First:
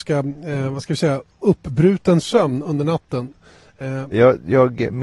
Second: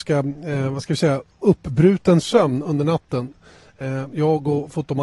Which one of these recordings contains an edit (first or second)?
first